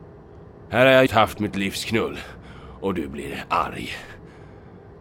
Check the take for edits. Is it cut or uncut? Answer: cut